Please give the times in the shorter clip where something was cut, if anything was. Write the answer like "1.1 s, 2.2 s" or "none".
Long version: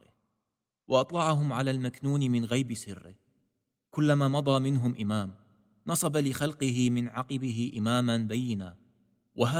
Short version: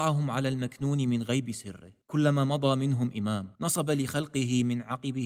2.0 s, 3.6 s